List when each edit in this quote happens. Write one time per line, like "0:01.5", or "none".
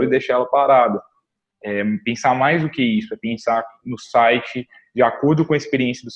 none